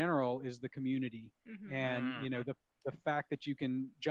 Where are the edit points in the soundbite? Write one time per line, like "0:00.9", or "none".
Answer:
none